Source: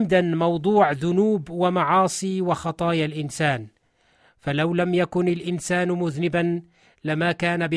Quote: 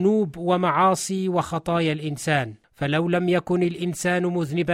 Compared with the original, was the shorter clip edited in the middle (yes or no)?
yes